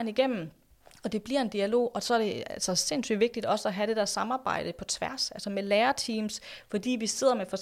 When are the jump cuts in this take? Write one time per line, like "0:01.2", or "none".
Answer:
none